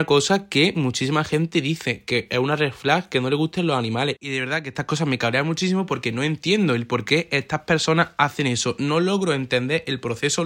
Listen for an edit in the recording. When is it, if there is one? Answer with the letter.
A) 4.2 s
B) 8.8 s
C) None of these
A